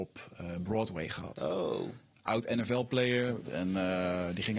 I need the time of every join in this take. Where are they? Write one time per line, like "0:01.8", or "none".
0:03.5